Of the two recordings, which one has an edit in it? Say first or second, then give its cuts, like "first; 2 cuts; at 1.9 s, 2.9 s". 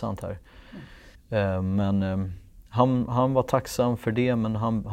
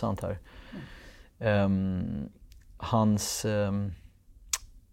first; 1 cut; at 1.1 s